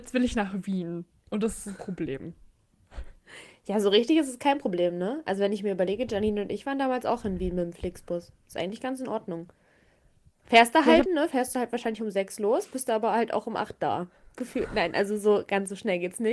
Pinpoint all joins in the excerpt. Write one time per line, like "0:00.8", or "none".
0:11.1